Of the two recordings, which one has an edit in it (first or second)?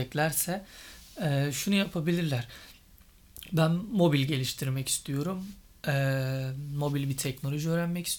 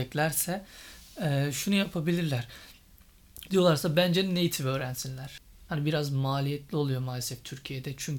second